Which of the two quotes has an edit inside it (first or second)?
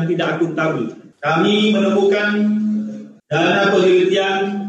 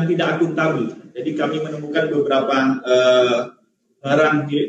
first